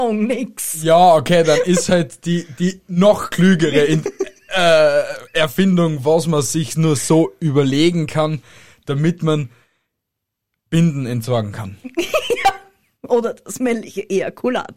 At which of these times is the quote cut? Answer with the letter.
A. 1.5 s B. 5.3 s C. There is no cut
C